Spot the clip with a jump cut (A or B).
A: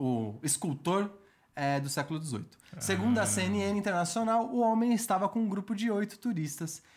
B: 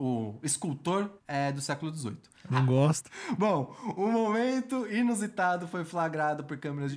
B